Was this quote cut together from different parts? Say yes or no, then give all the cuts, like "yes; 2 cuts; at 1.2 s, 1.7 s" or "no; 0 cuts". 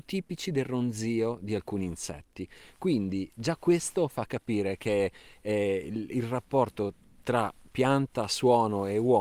no; 0 cuts